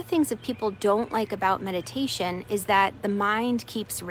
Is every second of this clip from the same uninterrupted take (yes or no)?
yes